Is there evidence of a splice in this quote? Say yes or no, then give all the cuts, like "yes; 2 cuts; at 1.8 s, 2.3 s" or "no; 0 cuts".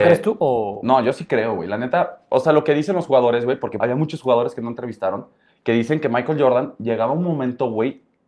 yes; 1 cut; at 3.8 s